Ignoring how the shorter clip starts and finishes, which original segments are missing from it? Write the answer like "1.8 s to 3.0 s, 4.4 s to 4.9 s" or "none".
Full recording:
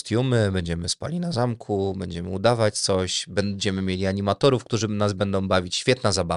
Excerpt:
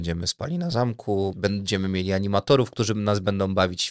1.9 s to 3.3 s